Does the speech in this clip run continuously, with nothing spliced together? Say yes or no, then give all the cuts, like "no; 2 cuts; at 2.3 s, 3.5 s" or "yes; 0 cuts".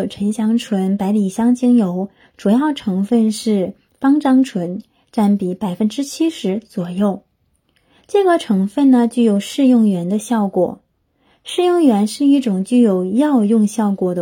yes; 0 cuts